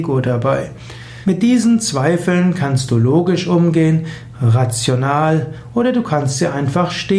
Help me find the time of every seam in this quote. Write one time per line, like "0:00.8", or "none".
0:01.2